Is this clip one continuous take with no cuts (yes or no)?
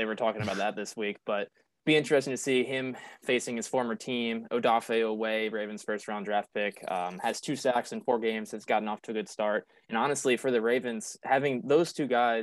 yes